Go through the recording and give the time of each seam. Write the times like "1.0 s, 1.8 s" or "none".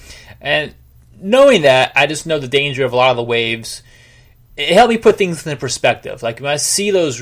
none